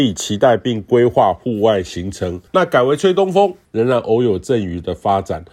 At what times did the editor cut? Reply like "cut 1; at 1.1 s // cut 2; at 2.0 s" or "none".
cut 1; at 2.5 s // cut 2; at 3.6 s